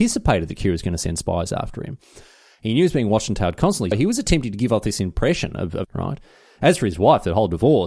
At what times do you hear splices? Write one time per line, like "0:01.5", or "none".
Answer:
0:03.9
0:05.8